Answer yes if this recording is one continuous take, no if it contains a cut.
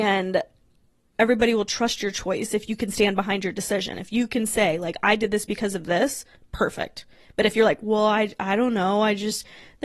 yes